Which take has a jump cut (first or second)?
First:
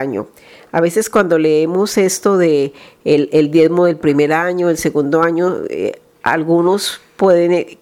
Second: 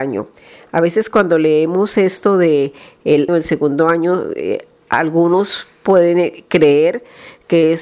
second